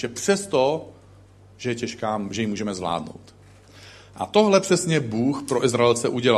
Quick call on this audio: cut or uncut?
uncut